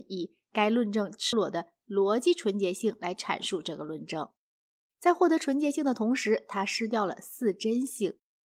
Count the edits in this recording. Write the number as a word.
one